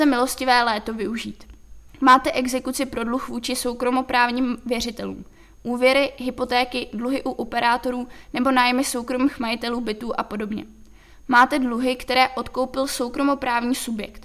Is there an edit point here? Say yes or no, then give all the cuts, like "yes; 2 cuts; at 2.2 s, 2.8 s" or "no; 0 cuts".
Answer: yes; 2 cuts; at 1.9 s, 11.1 s